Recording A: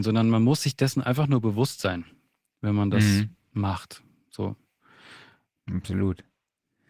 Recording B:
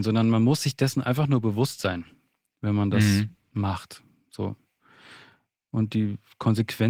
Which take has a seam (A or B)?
A